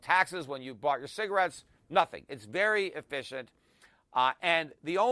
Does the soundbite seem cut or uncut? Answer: uncut